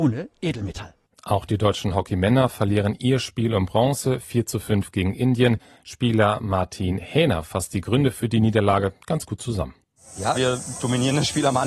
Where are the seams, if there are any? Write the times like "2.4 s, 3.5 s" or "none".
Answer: 10.3 s